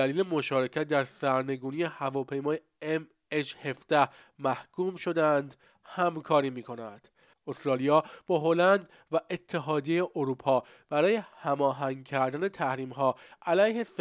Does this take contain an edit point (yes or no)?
yes